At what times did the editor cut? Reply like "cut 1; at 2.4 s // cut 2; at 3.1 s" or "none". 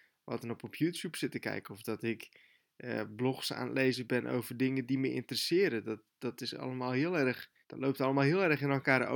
cut 1; at 7.6 s